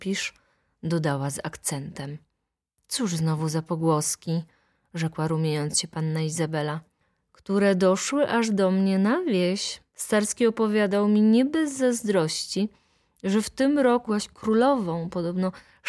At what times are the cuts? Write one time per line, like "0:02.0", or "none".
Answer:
0:14.1